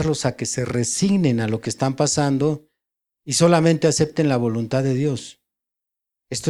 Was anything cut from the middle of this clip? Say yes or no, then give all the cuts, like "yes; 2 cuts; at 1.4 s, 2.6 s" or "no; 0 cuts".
no; 0 cuts